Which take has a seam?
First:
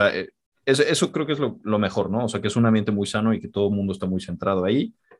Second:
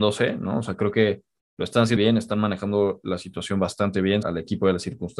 second; 2 cuts; at 2.0 s, 4.2 s

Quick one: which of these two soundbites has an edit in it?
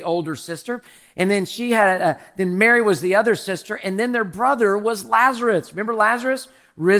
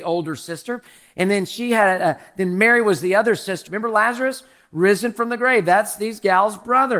second; 1 cut; at 3.7 s

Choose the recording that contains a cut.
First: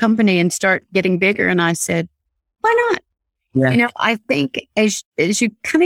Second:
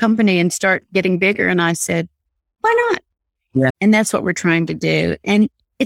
second; 1 cut; at 3.7 s

